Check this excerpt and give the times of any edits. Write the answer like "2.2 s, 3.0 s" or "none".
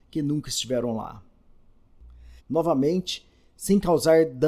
2.4 s